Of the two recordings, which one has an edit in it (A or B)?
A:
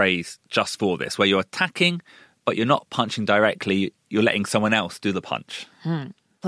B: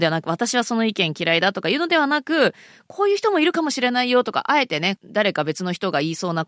B